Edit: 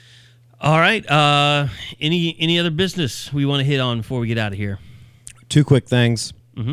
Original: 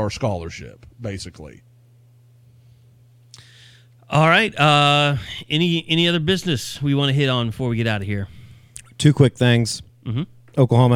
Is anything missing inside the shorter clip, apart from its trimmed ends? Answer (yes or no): no